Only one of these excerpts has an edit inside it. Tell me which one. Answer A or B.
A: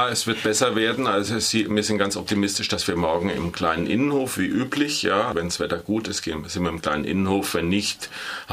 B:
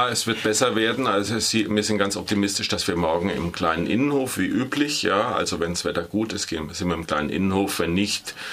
A